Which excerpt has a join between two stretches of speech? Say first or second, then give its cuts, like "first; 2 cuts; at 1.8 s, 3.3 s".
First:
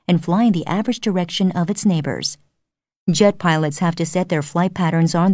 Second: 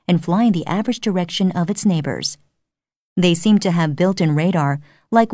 first; 1 cut; at 3.0 s